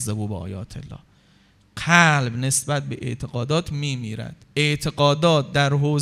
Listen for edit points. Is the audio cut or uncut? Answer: cut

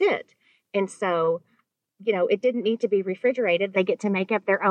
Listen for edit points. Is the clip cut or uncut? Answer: cut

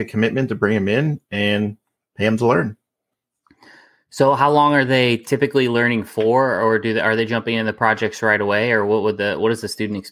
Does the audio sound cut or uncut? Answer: uncut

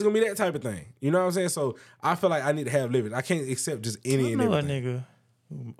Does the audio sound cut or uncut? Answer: uncut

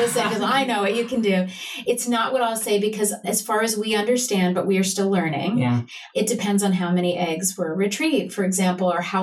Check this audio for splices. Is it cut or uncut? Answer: uncut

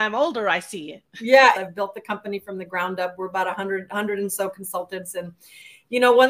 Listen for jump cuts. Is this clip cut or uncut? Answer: cut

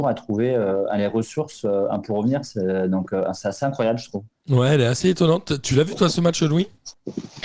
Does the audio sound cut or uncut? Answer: uncut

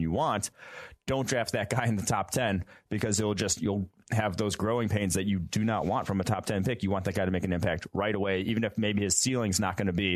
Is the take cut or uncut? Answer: uncut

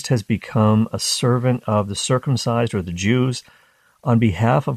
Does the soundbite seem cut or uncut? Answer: uncut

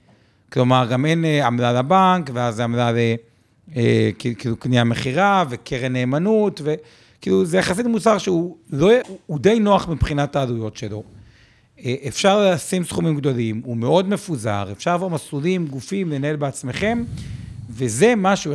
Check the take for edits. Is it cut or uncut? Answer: cut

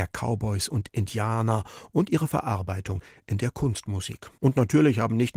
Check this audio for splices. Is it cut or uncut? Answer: uncut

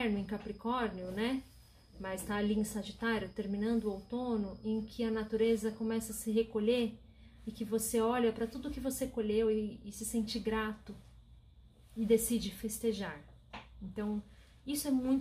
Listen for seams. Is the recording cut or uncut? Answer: uncut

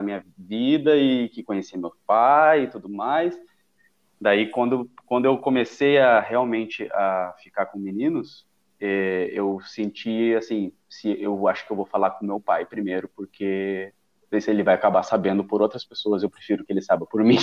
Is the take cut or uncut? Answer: uncut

